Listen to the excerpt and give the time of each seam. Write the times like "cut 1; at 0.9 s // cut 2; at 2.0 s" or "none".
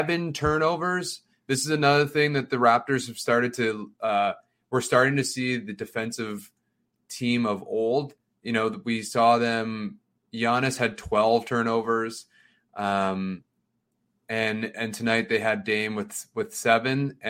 none